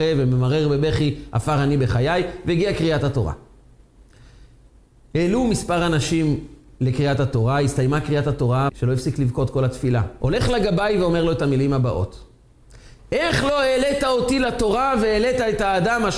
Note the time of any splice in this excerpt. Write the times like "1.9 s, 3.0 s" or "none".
8.7 s, 10.2 s, 13.0 s